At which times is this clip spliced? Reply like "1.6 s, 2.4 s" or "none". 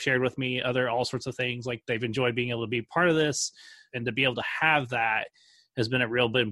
3.9 s